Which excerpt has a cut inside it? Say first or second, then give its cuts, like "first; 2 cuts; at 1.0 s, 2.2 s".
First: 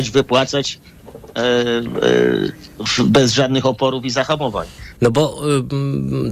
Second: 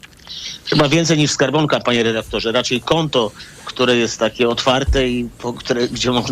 first; 1 cut; at 5.0 s